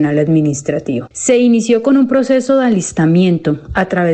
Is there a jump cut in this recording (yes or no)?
yes